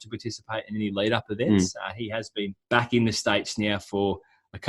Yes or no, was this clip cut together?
yes